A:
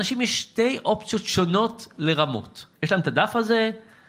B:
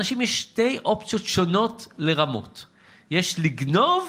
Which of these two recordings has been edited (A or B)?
A